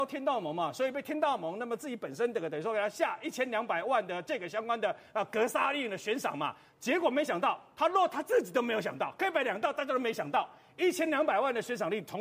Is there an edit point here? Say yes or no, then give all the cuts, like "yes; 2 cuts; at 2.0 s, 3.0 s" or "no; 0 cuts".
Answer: no; 0 cuts